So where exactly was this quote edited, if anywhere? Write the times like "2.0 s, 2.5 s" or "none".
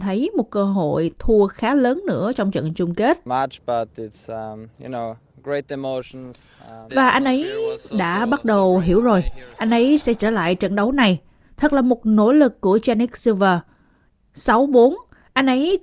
6.9 s